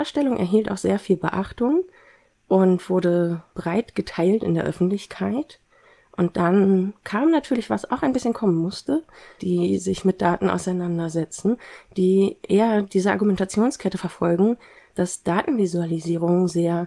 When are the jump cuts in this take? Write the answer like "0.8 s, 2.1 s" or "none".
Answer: 9.4 s